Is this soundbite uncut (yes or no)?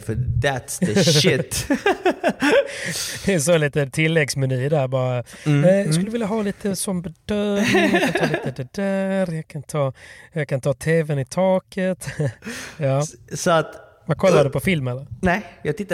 yes